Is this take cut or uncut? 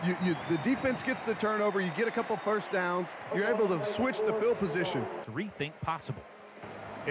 cut